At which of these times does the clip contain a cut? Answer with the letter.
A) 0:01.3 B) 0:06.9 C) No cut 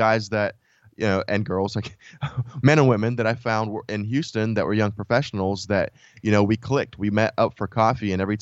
C